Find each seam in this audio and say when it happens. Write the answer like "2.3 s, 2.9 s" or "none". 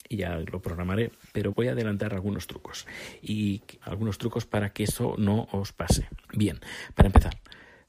1.5 s, 3.8 s, 6.2 s